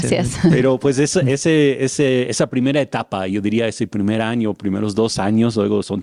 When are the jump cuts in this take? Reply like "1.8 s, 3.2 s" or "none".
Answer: none